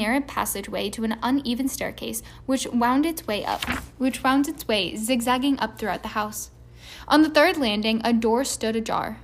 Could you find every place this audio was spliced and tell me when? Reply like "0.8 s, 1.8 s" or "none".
none